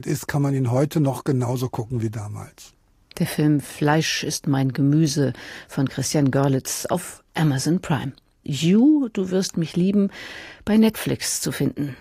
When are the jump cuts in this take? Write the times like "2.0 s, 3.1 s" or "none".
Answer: 8.4 s